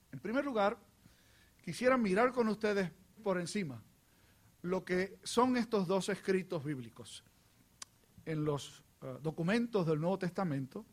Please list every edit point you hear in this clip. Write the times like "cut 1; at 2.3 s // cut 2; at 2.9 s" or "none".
cut 1; at 3.2 s